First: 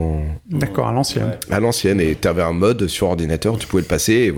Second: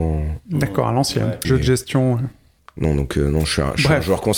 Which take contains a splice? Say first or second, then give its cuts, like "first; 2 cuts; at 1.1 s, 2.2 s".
second; 1 cut; at 1.4 s